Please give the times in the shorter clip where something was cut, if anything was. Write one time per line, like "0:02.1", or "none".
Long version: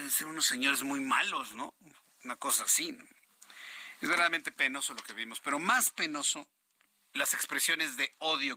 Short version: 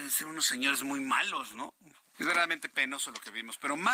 0:02.1